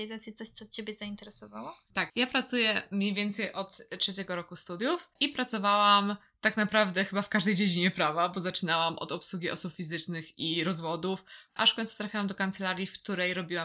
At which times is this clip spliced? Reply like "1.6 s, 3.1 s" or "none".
11.5 s